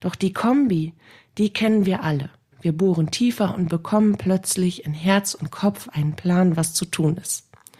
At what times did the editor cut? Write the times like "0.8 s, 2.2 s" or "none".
2.5 s

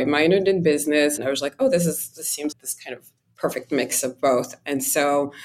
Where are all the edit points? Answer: 1.2 s, 2.5 s

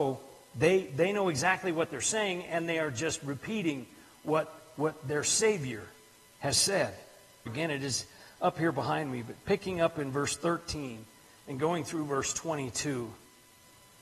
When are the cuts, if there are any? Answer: 7.5 s

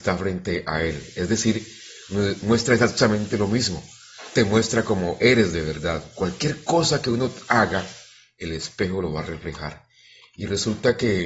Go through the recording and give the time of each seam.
none

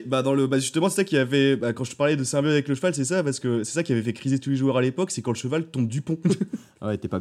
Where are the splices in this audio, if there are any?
6.2 s

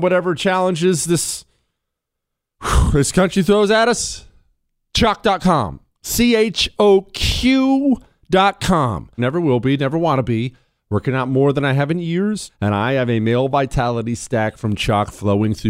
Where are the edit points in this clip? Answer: 9.2 s, 12.5 s

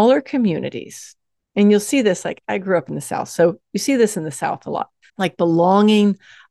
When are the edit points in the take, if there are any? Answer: 5.1 s

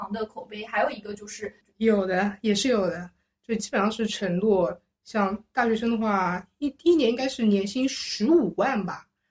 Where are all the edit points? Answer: 1.7 s

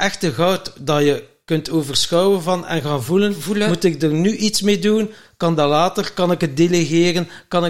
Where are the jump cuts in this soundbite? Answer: none

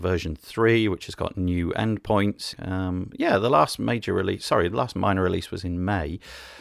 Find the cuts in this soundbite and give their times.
2.5 s

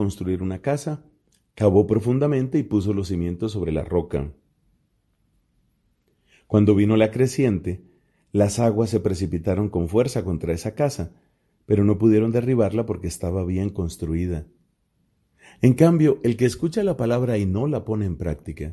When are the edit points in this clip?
none

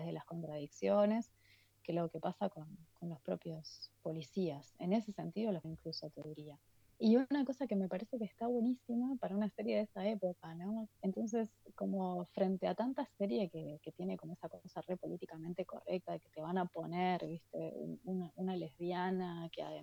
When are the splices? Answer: 5.6 s, 10.9 s

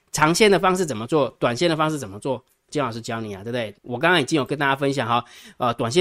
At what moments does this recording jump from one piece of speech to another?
2.7 s, 3.7 s

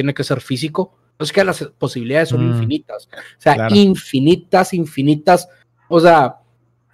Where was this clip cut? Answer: 1.2 s

